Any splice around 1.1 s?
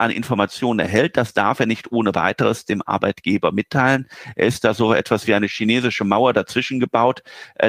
no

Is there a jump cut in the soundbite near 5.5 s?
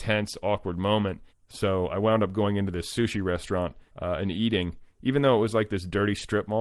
no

